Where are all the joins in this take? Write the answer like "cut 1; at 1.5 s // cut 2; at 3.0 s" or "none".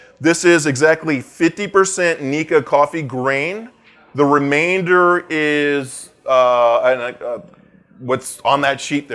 none

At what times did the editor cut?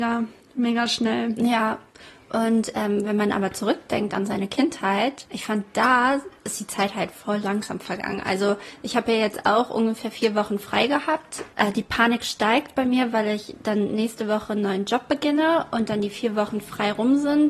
none

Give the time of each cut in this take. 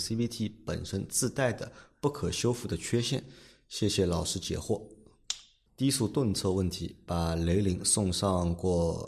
cut 1; at 5.7 s

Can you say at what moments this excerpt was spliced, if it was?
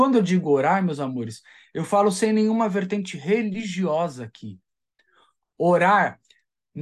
none

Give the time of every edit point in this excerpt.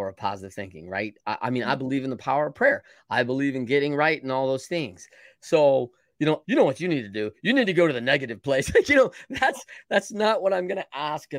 cut 1; at 6.4 s

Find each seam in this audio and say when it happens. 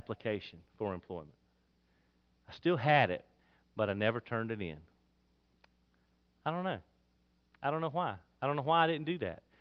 none

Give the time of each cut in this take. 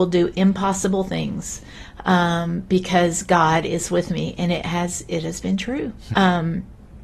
cut 1; at 6.1 s

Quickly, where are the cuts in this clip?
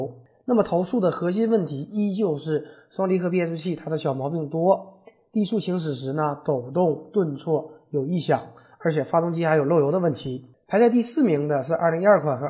none

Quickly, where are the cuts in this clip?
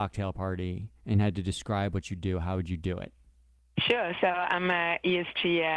none

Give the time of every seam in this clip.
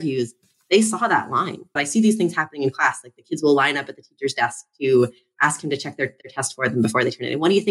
cut 1; at 1.8 s

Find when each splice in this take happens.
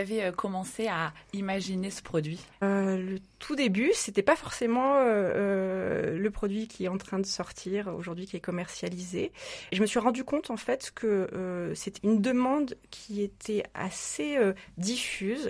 cut 1; at 12.0 s

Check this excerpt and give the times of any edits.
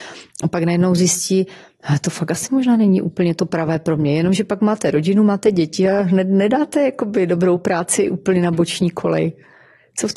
cut 1; at 3.4 s

